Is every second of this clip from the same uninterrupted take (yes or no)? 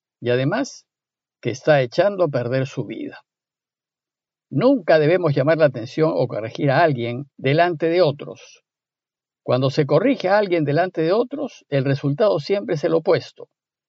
no